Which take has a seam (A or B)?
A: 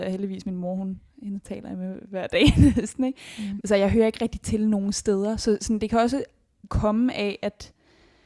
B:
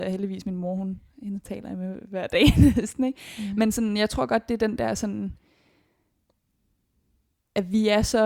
A